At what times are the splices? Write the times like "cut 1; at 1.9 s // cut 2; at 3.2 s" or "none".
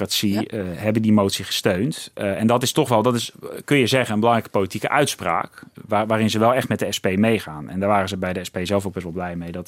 none